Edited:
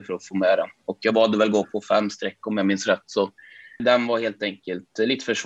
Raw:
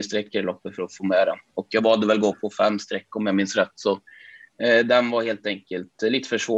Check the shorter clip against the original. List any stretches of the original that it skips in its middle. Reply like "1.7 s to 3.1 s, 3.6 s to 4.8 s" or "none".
4.5 s to 4.8 s